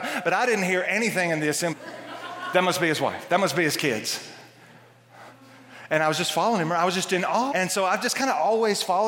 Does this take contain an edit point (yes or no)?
yes